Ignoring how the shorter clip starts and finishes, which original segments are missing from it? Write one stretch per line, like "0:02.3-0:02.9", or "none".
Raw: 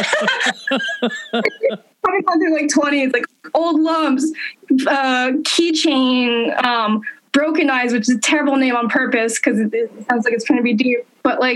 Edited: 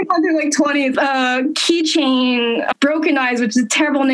0:03.1-0:04.8
0:06.6-0:07.2